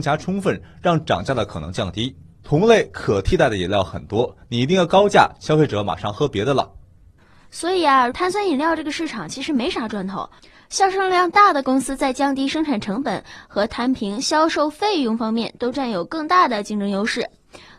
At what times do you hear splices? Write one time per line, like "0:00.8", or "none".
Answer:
0:08.1